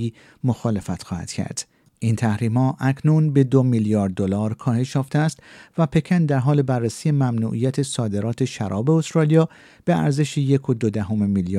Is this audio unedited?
no; 1 cut; at 1.8 s

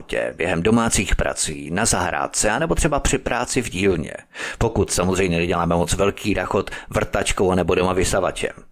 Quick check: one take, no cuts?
yes; 0 cuts

